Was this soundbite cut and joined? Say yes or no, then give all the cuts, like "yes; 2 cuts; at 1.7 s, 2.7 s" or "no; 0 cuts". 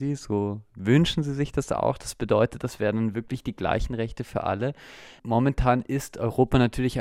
no; 0 cuts